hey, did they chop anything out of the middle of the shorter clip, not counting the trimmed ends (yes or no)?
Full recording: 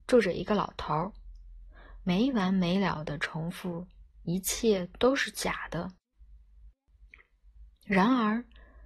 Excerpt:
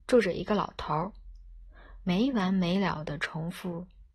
no